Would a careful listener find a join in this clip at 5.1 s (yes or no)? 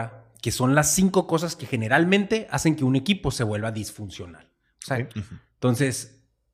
yes